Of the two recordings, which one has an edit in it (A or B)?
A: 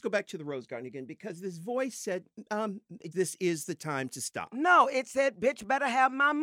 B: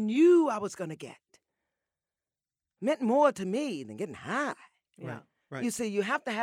A